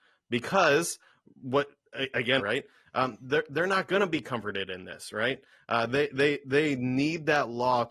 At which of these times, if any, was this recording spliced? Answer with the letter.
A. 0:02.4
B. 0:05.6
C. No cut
A